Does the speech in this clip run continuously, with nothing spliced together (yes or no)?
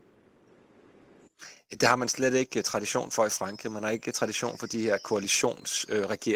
yes